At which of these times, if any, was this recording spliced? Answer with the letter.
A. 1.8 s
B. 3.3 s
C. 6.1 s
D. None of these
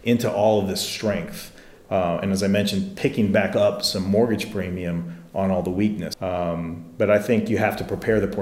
C